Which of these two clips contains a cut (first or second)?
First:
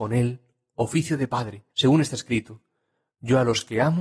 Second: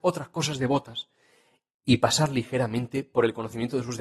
first